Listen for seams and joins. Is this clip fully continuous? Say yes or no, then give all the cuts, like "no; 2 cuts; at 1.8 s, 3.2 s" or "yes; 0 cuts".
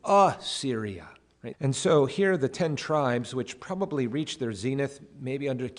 no; 1 cut; at 1.5 s